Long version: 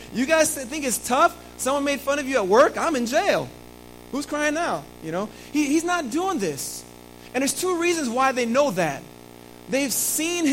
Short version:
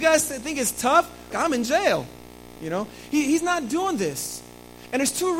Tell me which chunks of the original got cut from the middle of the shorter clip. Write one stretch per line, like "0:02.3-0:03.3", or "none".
0:01.6-0:02.7
0:04.0-0:05.0